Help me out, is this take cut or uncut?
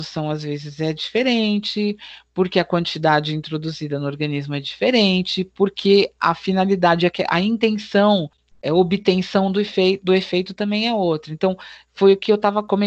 uncut